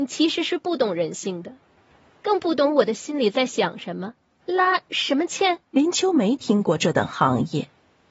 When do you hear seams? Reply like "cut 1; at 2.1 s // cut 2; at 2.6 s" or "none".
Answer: cut 1; at 4.4 s // cut 2; at 5.7 s